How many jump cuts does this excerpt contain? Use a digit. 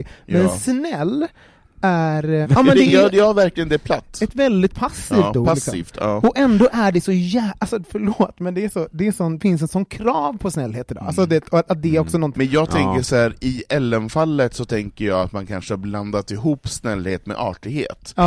2